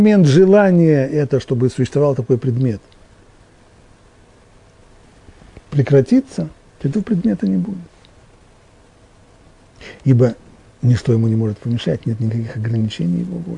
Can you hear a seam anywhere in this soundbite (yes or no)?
no